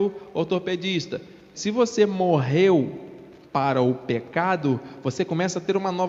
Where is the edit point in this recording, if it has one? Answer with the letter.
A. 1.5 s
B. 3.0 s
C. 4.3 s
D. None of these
A